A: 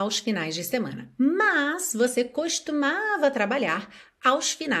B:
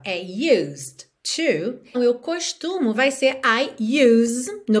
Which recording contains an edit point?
B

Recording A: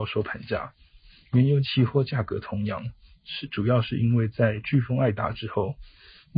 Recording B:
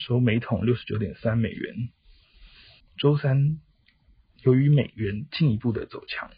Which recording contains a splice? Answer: B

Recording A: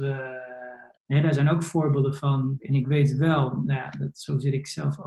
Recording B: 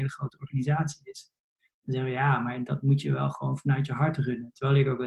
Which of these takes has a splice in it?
A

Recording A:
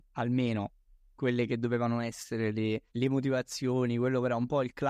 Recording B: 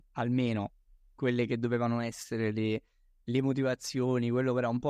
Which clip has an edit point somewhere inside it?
A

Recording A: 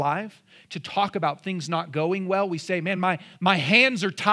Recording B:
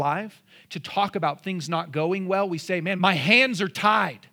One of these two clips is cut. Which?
B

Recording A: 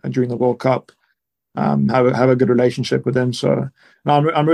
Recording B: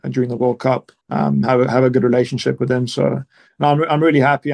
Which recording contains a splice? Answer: B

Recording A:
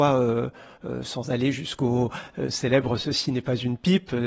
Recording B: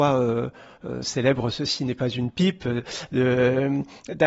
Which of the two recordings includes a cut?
B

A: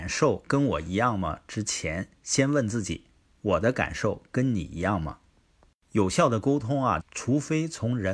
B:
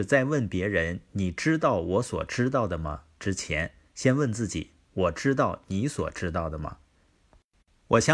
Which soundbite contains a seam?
A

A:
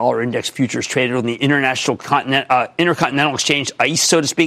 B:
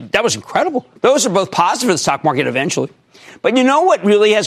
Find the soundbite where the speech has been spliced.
B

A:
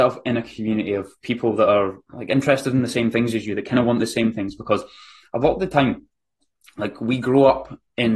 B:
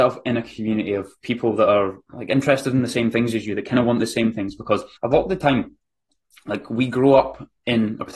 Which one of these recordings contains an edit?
B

